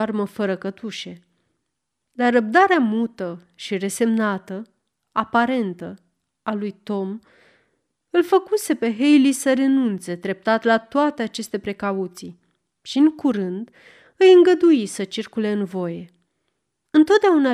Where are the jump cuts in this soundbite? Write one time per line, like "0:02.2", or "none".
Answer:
none